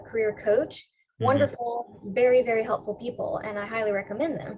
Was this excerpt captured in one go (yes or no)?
yes